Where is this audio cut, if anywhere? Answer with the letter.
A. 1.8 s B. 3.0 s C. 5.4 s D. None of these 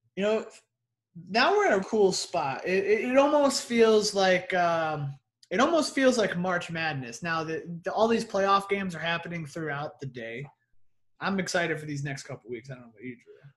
A